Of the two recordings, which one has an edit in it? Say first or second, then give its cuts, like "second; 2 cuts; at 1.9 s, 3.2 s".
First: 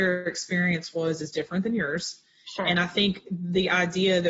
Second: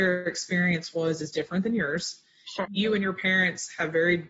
second; 1 cut; at 2.6 s